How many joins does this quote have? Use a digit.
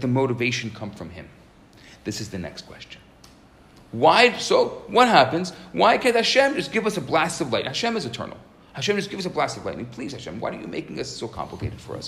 0